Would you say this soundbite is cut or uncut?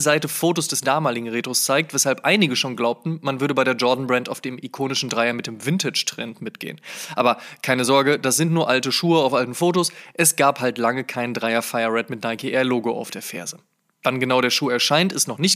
uncut